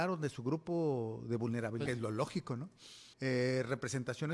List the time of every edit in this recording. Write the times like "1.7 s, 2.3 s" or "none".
1.9 s, 3.1 s